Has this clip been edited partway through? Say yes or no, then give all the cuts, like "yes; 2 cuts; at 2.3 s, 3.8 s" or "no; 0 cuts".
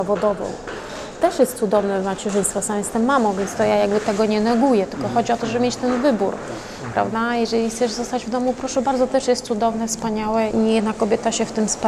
yes; 1 cut; at 10.5 s